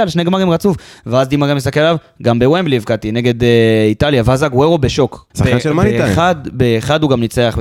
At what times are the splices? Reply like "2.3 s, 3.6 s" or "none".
5.3 s

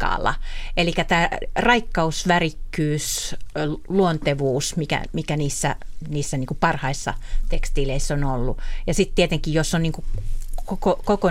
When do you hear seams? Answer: none

